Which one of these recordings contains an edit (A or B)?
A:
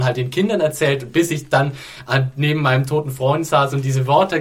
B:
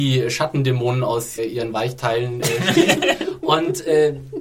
B